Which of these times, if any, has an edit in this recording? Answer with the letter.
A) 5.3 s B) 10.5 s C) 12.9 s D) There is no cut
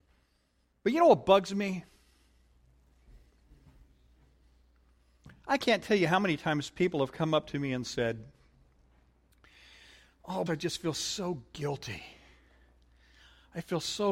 B